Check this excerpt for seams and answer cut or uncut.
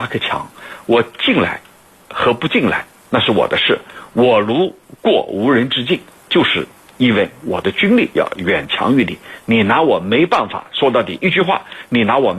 uncut